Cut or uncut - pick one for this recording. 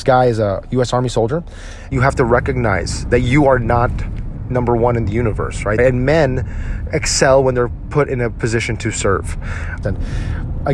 cut